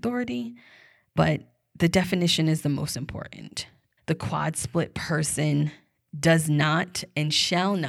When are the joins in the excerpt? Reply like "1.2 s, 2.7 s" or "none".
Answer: 4.0 s